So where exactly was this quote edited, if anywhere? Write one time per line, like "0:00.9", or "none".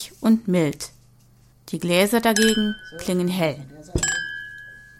0:01.5